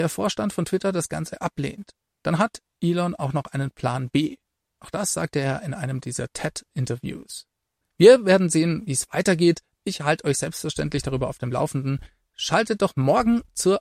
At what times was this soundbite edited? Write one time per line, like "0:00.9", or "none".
none